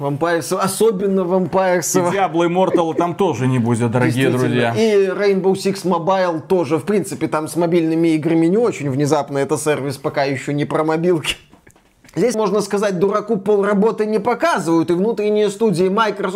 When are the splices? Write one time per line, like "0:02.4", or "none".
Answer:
0:12.3